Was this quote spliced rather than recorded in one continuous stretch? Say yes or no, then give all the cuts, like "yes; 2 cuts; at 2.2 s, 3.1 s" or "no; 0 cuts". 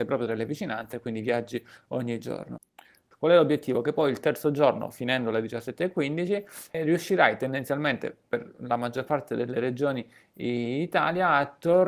yes; 2 cuts; at 3.1 s, 6.7 s